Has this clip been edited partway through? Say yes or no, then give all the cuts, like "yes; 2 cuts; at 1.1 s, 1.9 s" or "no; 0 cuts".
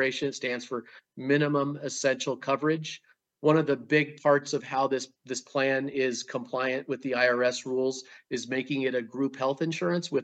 no; 0 cuts